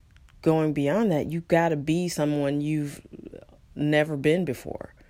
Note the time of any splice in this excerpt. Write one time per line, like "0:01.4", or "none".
none